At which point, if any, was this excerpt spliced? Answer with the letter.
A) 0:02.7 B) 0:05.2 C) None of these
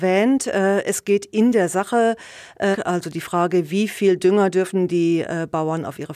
A